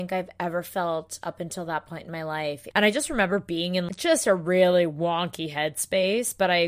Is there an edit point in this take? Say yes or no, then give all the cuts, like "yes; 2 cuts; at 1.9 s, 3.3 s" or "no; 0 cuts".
yes; 1 cut; at 2.7 s